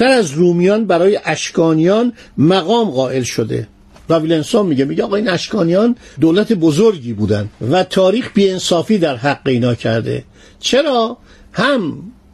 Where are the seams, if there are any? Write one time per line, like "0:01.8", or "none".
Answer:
none